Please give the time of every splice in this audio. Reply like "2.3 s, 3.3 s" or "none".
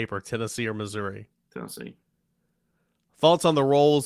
none